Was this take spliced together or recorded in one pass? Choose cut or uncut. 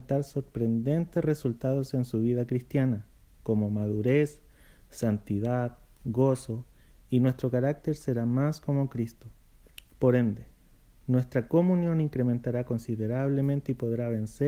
uncut